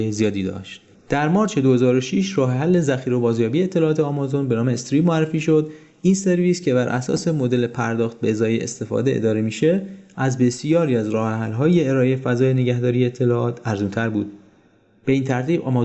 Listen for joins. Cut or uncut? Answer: cut